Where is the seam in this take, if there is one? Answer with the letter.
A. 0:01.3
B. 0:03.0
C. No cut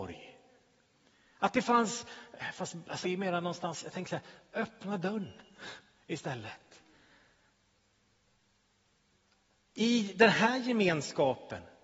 B